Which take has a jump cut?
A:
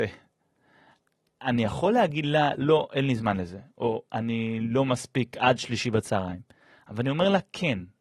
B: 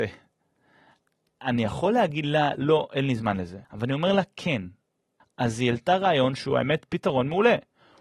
B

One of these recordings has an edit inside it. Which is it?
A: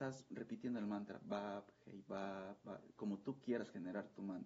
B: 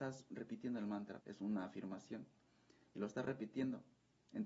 B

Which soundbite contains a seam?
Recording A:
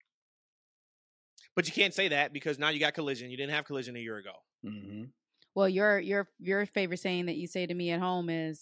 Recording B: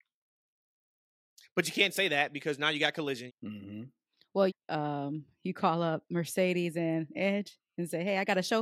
B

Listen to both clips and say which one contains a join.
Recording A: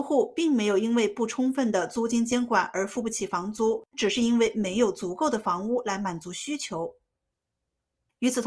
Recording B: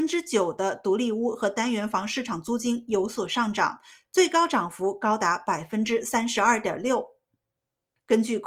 A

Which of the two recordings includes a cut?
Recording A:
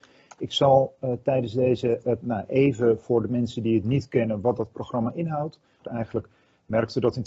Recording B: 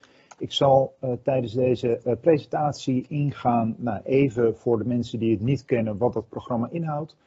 A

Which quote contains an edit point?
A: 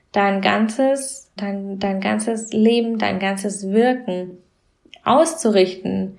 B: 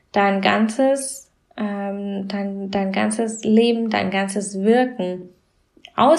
A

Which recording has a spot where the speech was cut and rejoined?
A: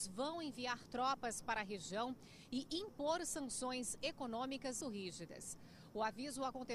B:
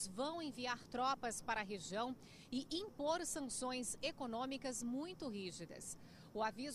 A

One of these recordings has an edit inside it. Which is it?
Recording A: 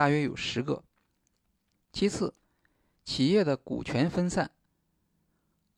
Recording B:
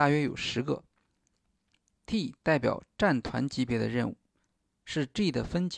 A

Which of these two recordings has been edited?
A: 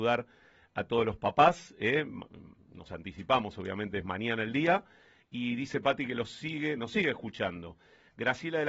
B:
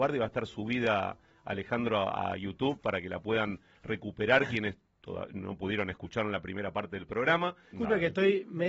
B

